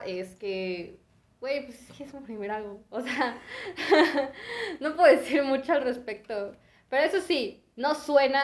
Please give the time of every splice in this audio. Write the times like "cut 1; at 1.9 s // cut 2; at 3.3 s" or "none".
none